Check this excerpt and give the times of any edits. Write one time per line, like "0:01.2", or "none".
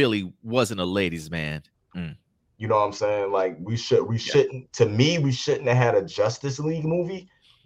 0:01.7